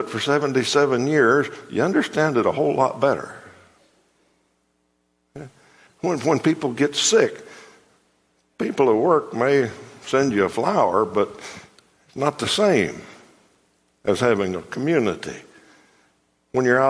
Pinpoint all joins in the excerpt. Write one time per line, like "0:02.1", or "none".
0:05.9